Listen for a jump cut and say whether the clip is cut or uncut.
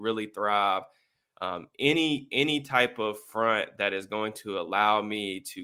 cut